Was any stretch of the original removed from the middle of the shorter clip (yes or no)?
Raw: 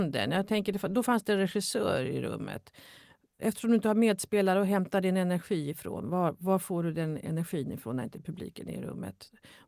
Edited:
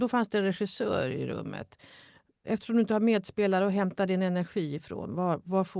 no